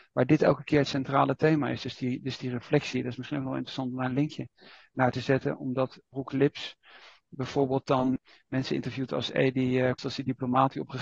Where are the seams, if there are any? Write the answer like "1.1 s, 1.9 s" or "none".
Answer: 10.0 s